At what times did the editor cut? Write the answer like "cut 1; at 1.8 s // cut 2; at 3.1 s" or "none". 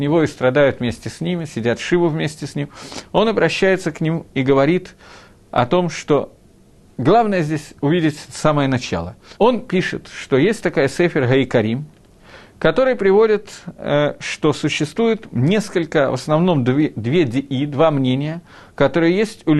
cut 1; at 9.4 s

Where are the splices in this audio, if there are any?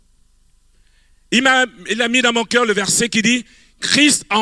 none

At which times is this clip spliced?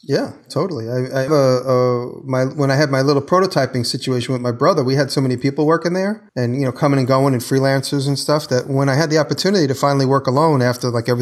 cut 1; at 1.3 s // cut 2; at 6.3 s

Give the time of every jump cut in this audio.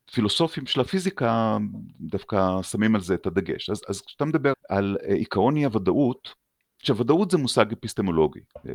cut 1; at 4.5 s

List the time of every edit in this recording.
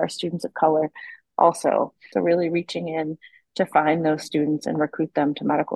cut 1; at 2.1 s

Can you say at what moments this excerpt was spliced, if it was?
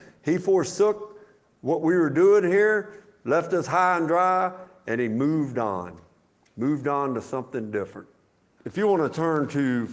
cut 1; at 8.6 s

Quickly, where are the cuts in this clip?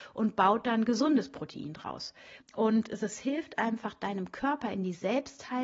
cut 1; at 2.4 s

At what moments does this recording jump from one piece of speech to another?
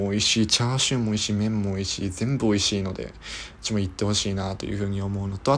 none

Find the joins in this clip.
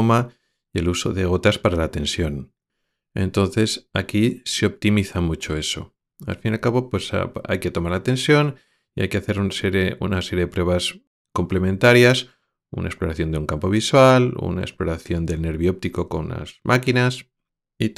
none

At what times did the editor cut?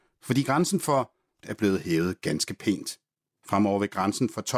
cut 1; at 1.4 s // cut 2; at 3.4 s

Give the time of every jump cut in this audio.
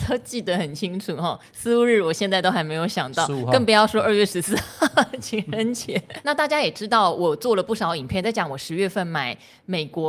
cut 1; at 6.2 s // cut 2; at 8.2 s

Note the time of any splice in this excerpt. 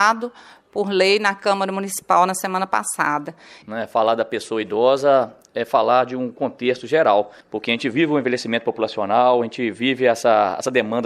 cut 1; at 3.6 s

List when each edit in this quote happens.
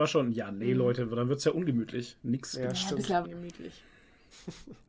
cut 1; at 3.2 s

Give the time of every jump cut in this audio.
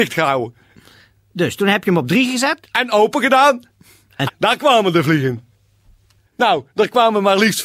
cut 1; at 4.3 s // cut 2; at 6.2 s

